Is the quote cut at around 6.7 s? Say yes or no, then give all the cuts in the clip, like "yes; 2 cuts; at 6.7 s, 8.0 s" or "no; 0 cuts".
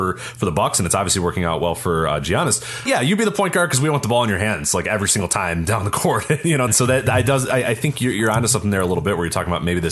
yes; 2 cuts; at 2.9 s, 6.7 s